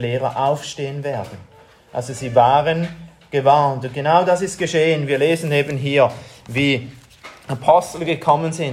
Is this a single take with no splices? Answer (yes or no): yes